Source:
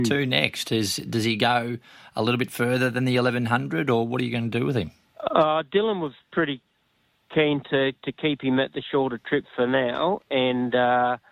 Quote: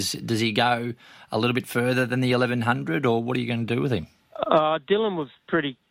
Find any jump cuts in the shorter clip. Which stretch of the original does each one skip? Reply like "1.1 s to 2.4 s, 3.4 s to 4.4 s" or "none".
none